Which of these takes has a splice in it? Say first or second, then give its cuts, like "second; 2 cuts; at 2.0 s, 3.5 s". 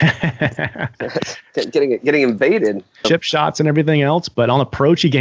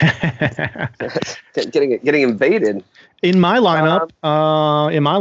first; 1 cut; at 3.0 s